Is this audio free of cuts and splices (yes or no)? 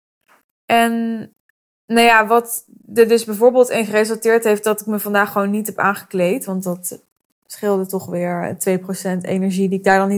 yes